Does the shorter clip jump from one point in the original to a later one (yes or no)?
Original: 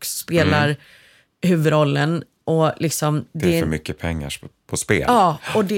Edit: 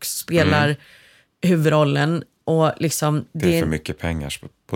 no